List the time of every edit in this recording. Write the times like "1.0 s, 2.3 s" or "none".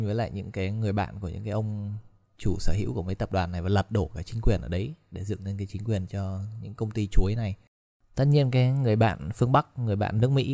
none